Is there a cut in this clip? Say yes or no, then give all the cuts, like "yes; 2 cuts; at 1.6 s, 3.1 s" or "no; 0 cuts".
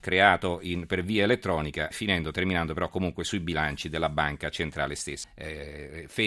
yes; 2 cuts; at 1.9 s, 5.2 s